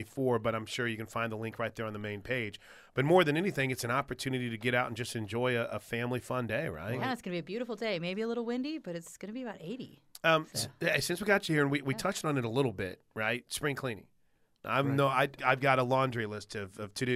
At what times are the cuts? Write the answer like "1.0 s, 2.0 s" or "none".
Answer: 15.4 s